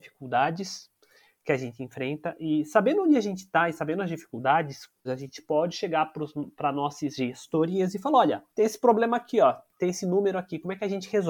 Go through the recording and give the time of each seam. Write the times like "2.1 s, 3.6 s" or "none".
5.0 s, 8.5 s